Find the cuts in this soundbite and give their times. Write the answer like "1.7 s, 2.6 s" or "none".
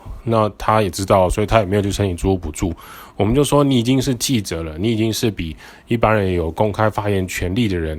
none